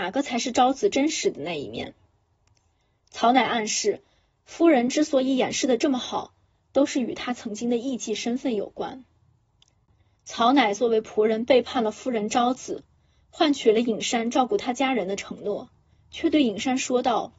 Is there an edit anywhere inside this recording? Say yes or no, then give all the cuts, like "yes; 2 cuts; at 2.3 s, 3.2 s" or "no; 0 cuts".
no; 0 cuts